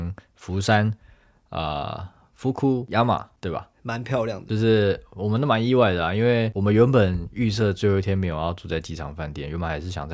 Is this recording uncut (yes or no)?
no